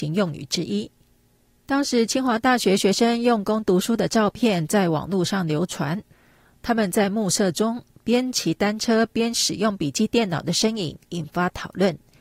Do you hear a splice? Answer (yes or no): no